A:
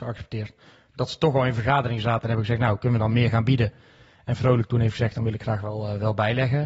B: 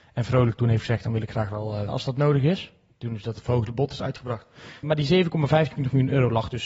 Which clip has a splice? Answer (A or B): B